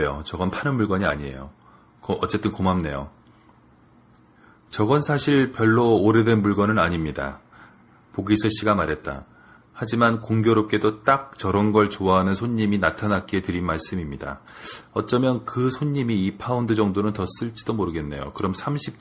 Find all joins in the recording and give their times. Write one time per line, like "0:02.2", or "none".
0:09.6

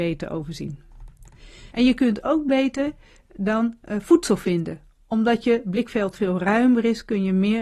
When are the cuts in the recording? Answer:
0:01.7

